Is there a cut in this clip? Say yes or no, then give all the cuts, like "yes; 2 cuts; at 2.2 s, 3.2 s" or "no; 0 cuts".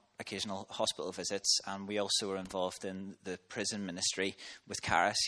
no; 0 cuts